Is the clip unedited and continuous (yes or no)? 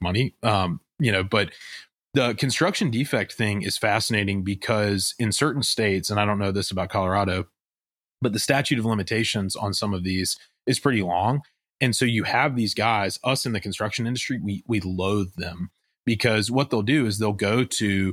yes